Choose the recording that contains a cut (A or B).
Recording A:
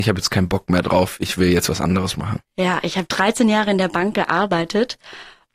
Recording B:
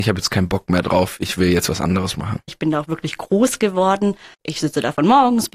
B